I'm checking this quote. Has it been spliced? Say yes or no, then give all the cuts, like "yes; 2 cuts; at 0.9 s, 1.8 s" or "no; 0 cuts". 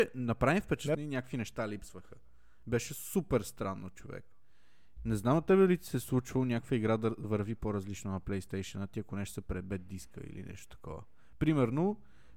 yes; 2 cuts; at 0.9 s, 5.0 s